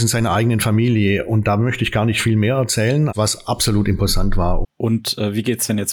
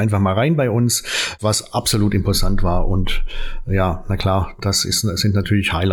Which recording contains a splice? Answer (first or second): first